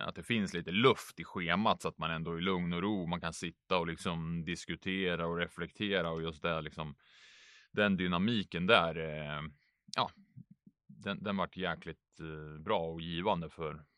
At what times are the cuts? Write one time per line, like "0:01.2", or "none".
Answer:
none